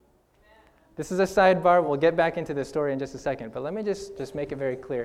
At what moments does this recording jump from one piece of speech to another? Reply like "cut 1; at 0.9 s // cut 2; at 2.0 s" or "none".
none